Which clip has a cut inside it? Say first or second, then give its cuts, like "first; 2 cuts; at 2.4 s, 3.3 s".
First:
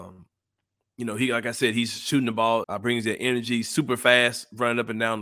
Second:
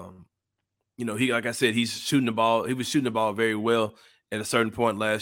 first; 1 cut; at 2.6 s